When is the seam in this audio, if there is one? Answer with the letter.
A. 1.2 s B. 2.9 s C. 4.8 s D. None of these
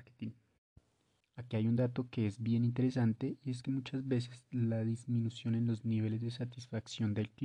A